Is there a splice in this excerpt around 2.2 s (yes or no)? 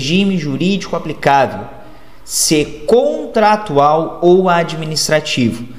no